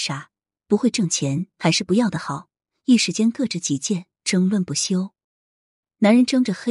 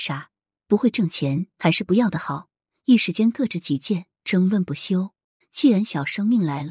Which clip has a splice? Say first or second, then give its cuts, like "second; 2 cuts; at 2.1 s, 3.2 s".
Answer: second; 1 cut; at 5.4 s